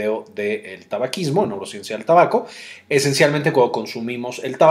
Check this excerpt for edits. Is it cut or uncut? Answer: uncut